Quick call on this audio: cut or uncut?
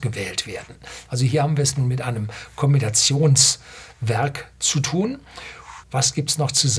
cut